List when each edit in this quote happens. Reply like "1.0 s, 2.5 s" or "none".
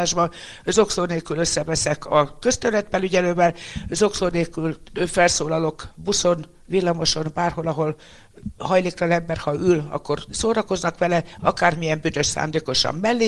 none

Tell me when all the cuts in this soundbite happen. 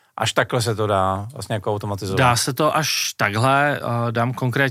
none

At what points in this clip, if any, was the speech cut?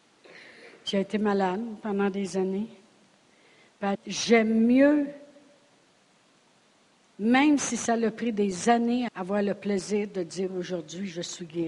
3.9 s, 9.1 s

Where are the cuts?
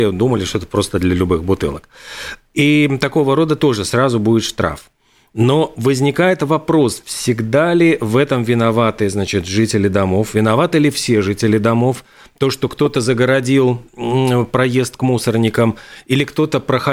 none

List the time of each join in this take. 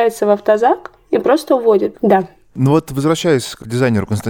1.9 s

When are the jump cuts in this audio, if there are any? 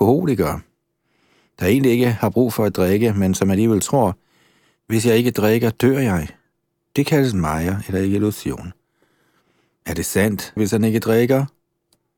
10.6 s

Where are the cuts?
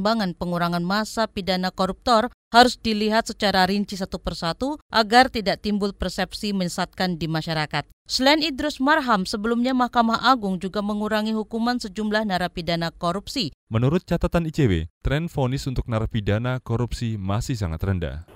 13.6 s

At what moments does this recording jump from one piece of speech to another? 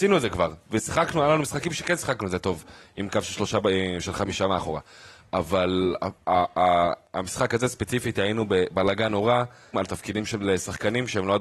9.7 s

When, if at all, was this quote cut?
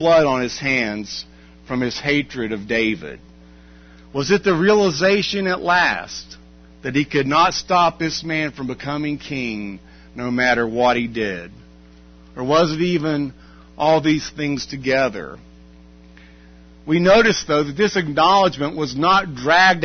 none

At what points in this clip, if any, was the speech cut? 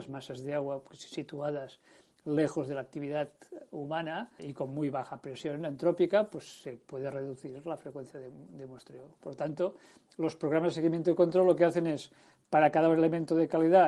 4.4 s

